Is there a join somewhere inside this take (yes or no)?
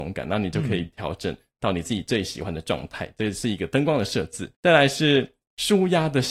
yes